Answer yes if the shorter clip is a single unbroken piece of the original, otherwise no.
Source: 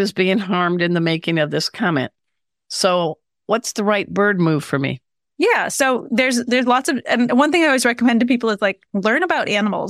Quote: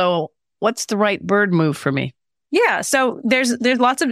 yes